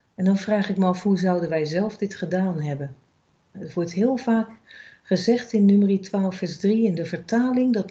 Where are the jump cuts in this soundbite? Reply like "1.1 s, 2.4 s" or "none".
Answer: 3.5 s